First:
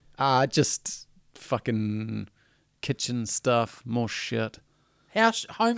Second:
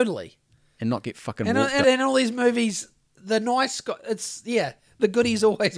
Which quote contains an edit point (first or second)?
second